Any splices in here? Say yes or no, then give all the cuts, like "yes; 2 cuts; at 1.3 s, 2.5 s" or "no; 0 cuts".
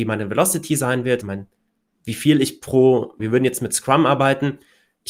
yes; 2 cuts; at 1.2 s, 3.2 s